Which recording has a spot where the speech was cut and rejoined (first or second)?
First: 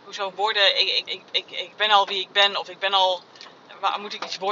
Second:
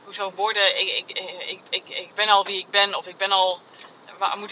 first